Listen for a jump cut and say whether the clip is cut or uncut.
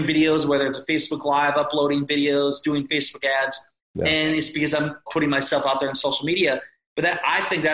cut